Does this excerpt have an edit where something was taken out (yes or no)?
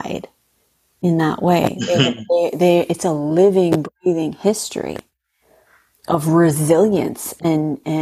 no